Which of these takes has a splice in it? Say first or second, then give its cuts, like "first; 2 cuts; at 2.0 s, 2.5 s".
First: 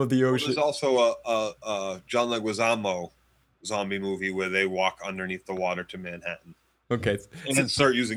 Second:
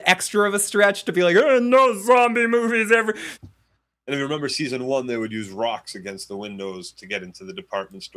second; 1 cut; at 3.4 s